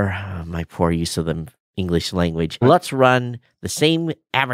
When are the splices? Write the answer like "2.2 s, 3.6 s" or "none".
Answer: 2.6 s